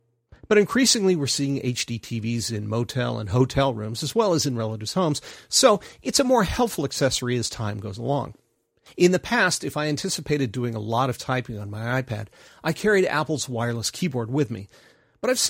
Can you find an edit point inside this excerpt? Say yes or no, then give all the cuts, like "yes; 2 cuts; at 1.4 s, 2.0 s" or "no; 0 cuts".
no; 0 cuts